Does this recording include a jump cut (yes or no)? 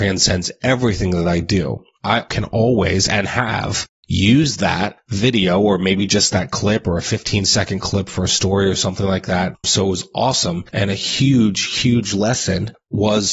yes